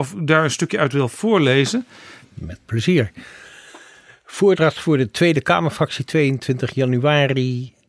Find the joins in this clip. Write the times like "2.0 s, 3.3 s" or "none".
none